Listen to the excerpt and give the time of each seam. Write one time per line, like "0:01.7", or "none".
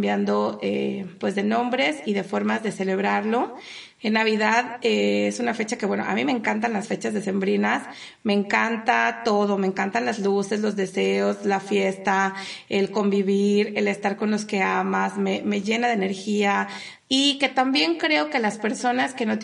0:04.0
0:17.0